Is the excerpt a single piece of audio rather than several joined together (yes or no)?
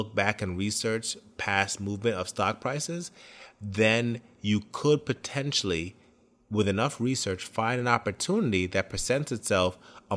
yes